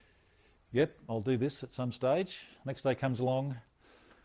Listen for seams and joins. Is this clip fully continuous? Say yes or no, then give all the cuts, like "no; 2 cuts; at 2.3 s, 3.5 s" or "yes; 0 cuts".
no; 1 cut; at 2.6 s